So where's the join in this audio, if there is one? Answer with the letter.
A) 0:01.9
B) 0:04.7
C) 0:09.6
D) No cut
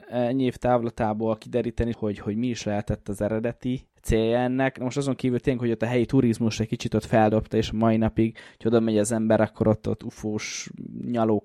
A